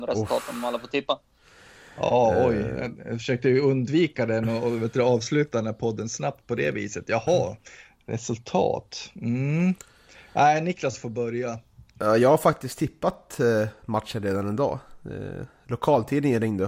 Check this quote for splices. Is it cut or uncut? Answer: uncut